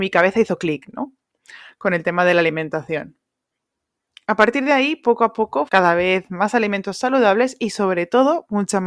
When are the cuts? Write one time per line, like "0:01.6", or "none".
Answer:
0:05.7